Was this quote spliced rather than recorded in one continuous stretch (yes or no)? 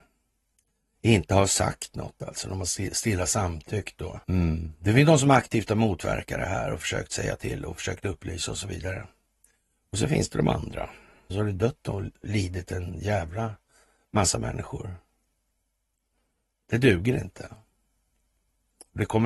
yes